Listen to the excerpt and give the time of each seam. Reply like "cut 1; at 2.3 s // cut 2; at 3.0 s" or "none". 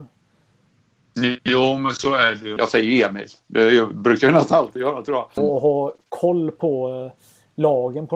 cut 1; at 2.6 s // cut 2; at 5.4 s